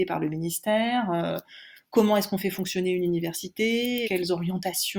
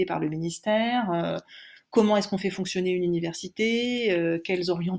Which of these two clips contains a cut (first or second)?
first